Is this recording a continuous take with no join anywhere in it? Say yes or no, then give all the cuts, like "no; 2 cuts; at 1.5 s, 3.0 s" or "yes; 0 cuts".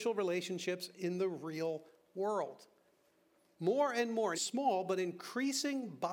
no; 1 cut; at 4.3 s